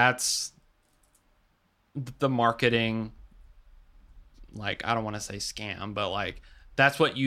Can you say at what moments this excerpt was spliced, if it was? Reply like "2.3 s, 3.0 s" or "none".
none